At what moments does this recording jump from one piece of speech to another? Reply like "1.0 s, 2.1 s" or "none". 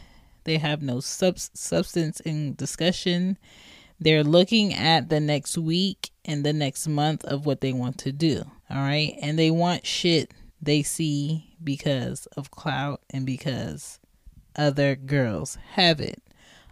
8.6 s, 10.5 s

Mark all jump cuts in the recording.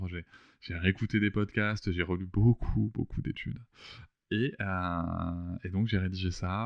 4.1 s

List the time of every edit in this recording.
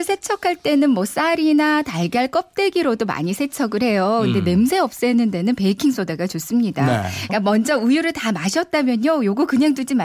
7.3 s

